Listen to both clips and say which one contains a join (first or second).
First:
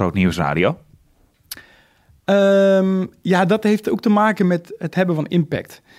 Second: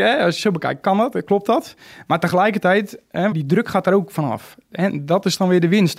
second